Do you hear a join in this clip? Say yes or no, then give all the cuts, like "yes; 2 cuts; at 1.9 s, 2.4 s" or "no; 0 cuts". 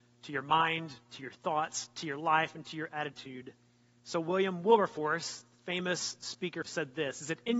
yes; 2 cuts; at 4.0 s, 6.6 s